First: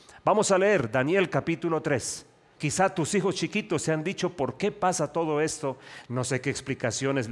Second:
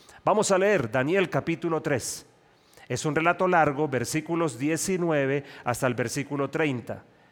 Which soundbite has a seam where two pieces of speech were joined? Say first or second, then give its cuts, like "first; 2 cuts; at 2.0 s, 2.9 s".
first; 1 cut; at 2.6 s